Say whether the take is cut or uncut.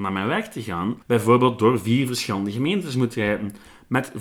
cut